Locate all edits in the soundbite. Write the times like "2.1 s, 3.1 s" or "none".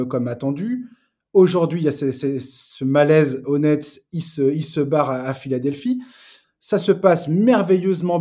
6.4 s